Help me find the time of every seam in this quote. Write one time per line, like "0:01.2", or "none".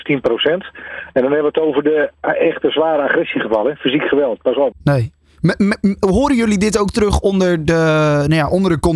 0:04.7